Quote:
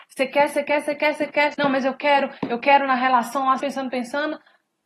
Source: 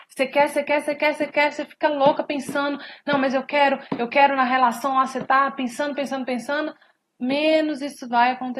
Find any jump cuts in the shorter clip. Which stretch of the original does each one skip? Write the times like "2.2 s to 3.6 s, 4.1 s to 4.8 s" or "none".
1.5 s to 3.0 s, 5.1 s to 6.0 s